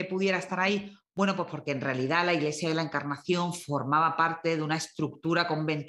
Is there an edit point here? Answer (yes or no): no